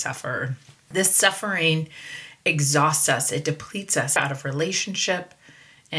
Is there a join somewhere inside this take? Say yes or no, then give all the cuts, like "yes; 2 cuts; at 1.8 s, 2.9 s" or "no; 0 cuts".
yes; 1 cut; at 4.2 s